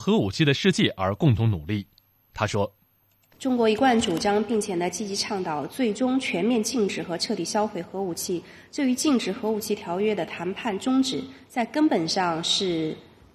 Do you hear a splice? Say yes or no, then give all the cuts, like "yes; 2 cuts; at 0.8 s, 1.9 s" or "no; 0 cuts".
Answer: no; 0 cuts